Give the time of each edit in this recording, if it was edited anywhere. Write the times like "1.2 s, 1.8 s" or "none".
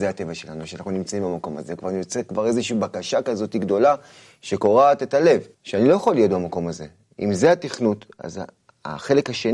5.5 s